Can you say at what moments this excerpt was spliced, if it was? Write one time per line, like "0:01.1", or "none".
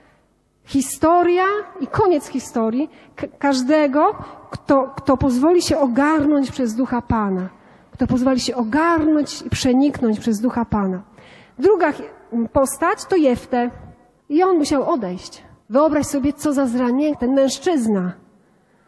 0:14.2
0:15.6
0:17.1